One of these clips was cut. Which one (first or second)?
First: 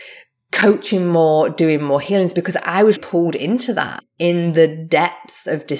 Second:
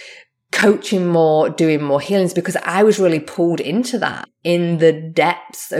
first